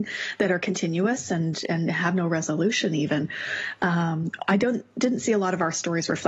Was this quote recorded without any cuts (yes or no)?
yes